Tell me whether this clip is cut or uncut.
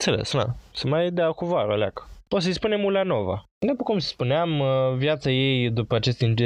cut